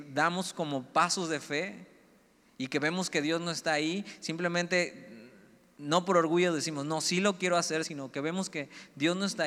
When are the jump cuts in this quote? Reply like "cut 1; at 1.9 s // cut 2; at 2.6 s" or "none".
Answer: cut 1; at 7.8 s